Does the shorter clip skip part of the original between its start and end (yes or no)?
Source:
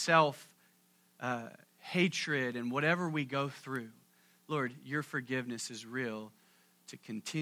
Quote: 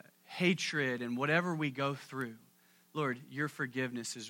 no